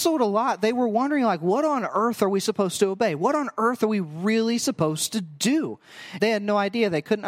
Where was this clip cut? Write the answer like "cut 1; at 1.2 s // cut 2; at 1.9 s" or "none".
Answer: cut 1; at 6.2 s